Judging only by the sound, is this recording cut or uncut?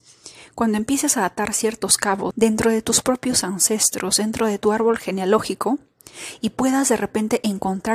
cut